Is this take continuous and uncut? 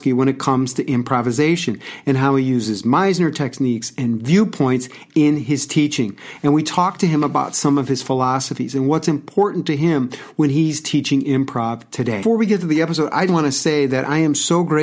no; 1 cut; at 13.3 s

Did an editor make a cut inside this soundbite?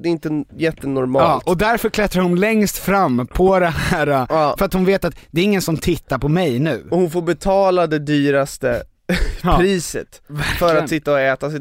no; 0 cuts

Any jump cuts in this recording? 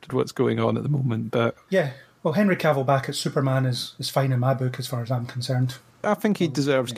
yes; 1 cut; at 1.7 s

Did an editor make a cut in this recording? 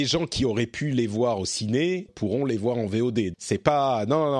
yes; 2 cuts; at 2.1 s, 3.3 s

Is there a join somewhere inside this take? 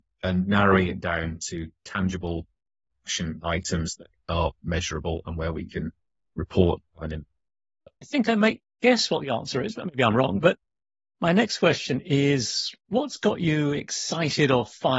no; 0 cuts

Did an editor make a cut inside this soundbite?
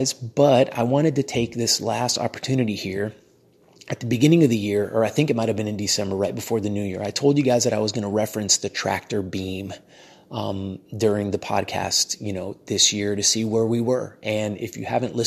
no; 0 cuts

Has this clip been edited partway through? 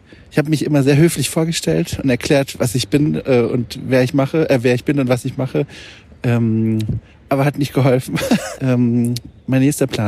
yes; 1 cut; at 8.5 s

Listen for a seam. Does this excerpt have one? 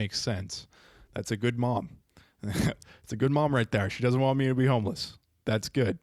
no; 0 cuts

